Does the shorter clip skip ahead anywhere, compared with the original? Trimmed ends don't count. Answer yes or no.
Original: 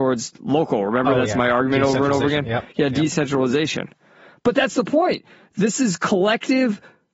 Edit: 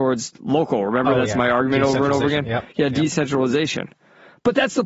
no